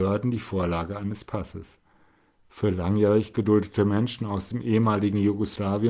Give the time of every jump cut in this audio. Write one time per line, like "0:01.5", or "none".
0:02.4